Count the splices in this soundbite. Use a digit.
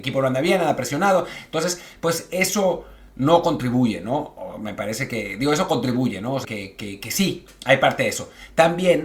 1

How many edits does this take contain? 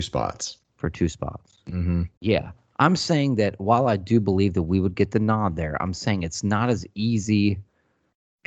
1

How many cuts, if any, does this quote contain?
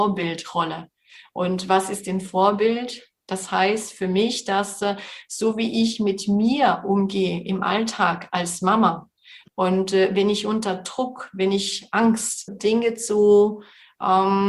2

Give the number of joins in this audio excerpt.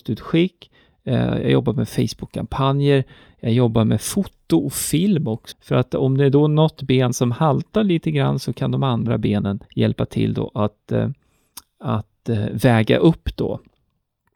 2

